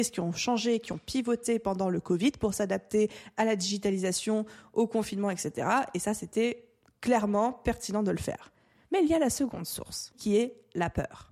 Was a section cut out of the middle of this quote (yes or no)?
yes